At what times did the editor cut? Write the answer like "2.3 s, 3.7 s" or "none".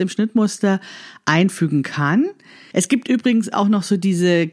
2.7 s